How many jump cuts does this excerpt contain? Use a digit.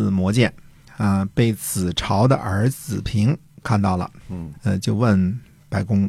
2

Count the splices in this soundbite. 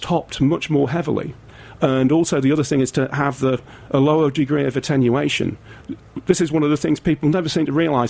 0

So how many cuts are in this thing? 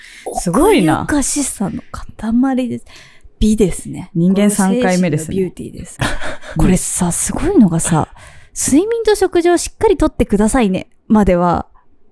1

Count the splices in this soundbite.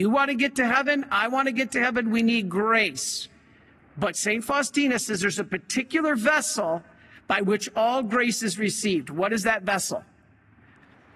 0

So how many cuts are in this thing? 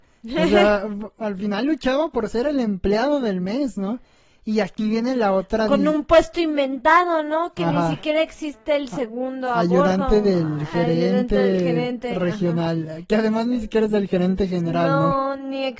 0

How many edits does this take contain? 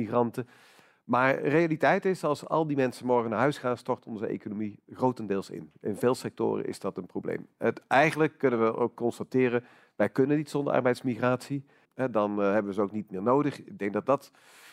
1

